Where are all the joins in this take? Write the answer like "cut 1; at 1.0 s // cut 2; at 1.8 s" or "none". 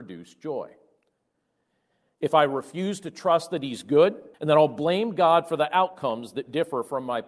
cut 1; at 4.3 s